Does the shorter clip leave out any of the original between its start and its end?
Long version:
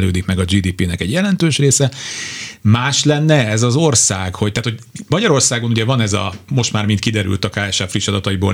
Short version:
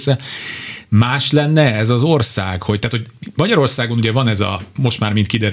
no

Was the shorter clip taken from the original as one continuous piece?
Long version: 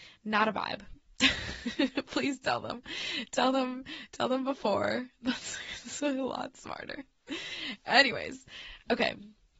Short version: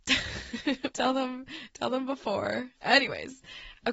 no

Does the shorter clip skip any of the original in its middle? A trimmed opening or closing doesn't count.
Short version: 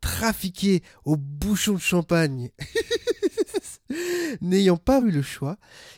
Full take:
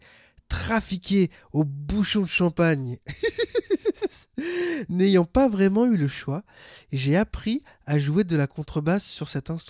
yes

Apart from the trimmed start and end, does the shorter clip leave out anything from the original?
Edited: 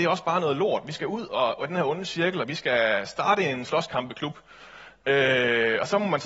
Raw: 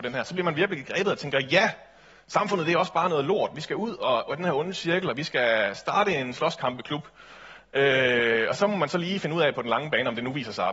no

